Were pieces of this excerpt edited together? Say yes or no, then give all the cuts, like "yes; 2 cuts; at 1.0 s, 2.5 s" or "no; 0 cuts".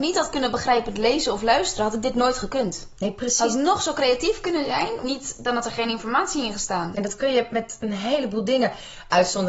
yes; 2 cuts; at 5.0 s, 6.9 s